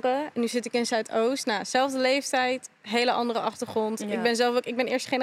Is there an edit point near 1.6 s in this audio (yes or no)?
no